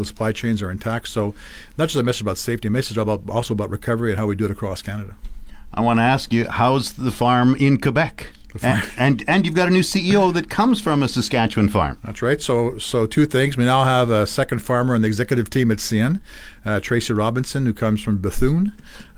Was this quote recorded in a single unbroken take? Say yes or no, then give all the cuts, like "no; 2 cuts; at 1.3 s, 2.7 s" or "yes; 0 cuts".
yes; 0 cuts